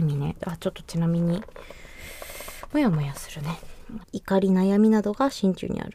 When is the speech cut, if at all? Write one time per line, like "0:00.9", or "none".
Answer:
0:04.0